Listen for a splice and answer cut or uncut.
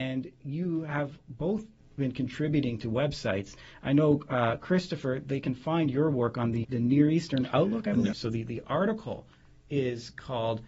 cut